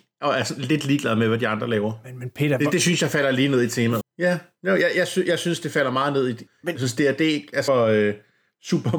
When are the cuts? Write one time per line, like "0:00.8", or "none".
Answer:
0:04.0
0:06.5
0:07.7